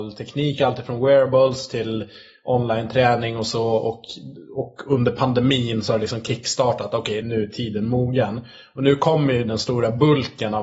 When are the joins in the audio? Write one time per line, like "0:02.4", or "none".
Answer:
0:07.2

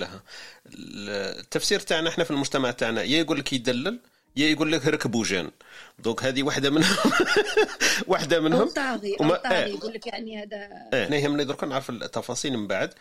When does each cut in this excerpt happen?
0:11.1

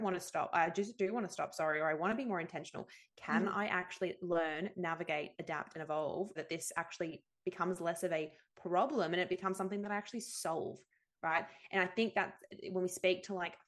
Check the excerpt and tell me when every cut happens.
0:06.4

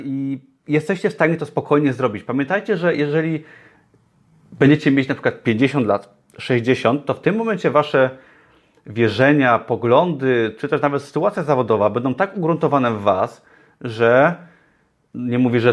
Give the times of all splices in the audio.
none

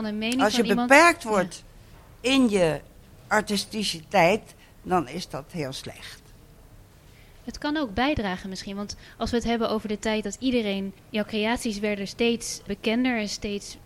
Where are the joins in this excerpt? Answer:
0:11.0
0:12.7

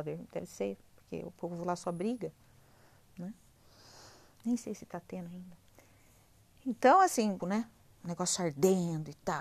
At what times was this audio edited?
0:07.4

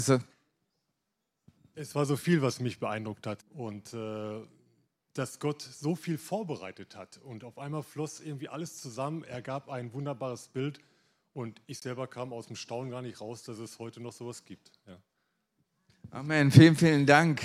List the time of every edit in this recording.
0:03.4

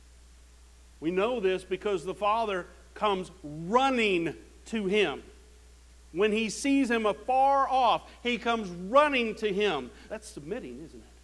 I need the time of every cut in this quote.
0:10.1

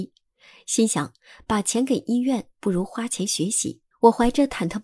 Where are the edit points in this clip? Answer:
0:03.9

